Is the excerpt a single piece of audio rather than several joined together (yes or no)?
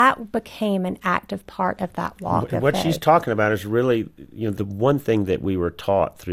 yes